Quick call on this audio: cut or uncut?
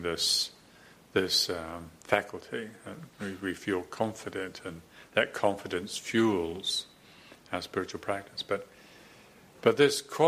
uncut